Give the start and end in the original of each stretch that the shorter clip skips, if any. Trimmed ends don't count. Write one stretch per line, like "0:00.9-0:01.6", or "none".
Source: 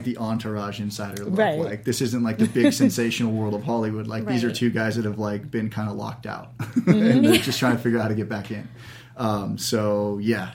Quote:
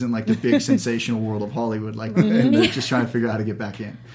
0:04.3-0:06.8